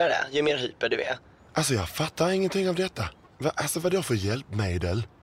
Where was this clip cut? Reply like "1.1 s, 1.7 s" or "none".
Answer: 1.4 s, 3.2 s

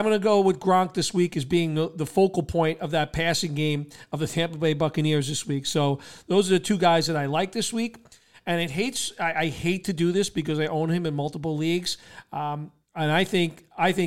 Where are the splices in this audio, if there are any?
none

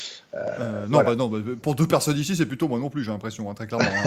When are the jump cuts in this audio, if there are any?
1.6 s

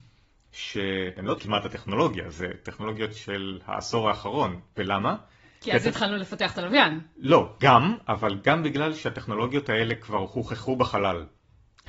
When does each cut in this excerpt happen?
7.6 s

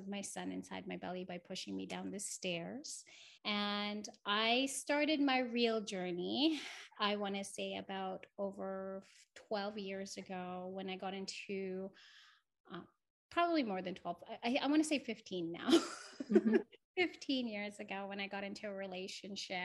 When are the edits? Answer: 3.4 s

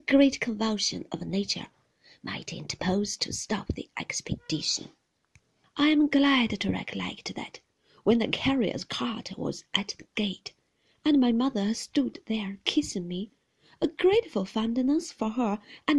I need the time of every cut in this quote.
5.6 s

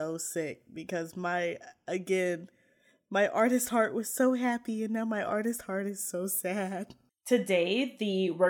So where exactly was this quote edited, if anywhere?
none

